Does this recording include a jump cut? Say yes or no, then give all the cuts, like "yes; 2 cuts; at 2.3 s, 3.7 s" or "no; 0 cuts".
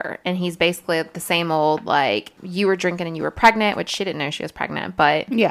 no; 0 cuts